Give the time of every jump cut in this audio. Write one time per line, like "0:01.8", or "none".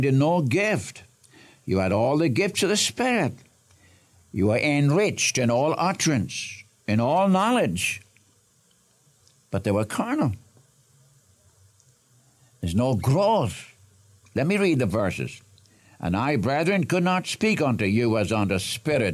none